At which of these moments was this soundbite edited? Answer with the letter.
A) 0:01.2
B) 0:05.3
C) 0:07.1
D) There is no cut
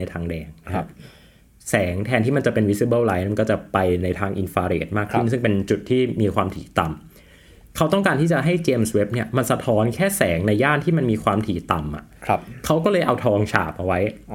D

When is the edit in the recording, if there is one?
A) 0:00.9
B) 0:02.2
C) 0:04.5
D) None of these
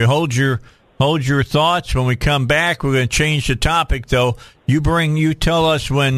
D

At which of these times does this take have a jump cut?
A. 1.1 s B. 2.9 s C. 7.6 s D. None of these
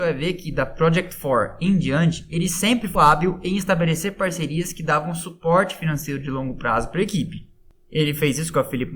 B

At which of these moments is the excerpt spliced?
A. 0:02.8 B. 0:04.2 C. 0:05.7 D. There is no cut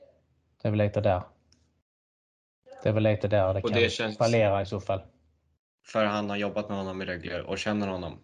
C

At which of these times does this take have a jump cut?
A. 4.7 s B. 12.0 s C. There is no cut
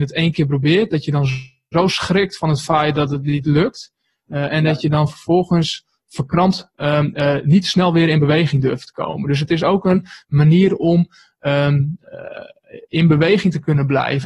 C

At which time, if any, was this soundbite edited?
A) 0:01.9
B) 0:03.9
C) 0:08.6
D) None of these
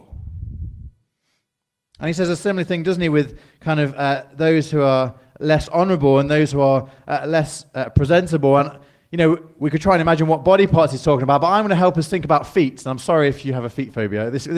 D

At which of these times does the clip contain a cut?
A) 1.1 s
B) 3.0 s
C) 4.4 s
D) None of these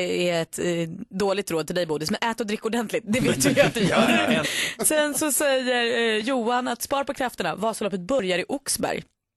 C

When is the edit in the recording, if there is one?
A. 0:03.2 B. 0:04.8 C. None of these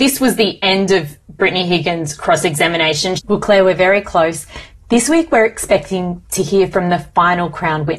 A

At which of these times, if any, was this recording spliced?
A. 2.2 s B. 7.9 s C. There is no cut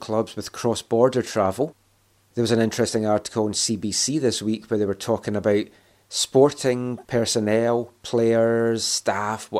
C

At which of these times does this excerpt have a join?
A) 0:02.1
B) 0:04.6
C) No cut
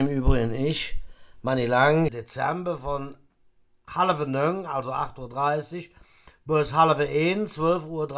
A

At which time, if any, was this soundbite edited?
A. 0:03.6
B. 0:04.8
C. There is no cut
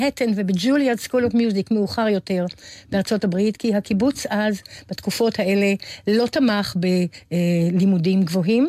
C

